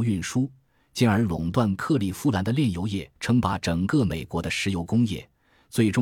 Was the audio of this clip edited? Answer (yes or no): yes